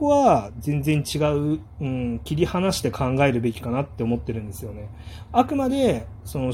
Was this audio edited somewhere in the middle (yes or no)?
no